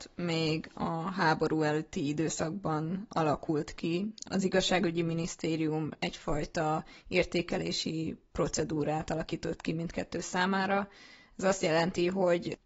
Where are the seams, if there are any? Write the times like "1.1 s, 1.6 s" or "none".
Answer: 4.2 s